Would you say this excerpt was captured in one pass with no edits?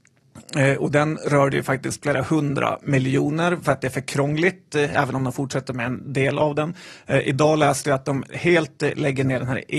yes; 0 cuts

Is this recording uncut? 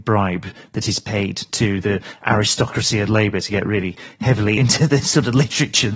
no; 1 cut; at 4.6 s

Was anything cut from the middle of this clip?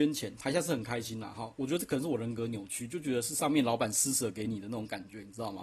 no; 0 cuts

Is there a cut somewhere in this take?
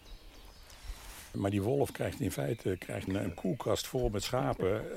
yes; 2 cuts; at 1.3 s, 3.1 s

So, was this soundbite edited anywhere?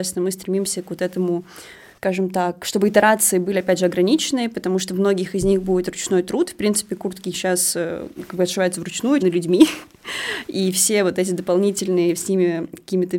yes; 1 cut; at 9.2 s

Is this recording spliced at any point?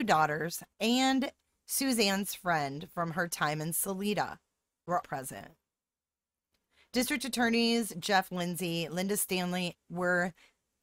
yes; 2 cuts; at 5.0 s, 9.7 s

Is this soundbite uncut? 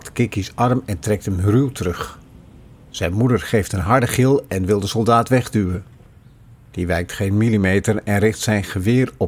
yes; 0 cuts

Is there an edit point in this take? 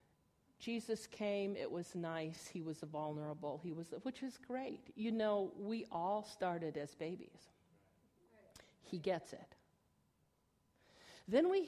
no; 0 cuts

